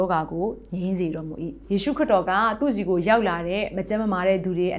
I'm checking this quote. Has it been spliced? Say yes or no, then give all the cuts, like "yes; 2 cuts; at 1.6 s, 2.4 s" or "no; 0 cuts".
yes; 1 cut; at 1.6 s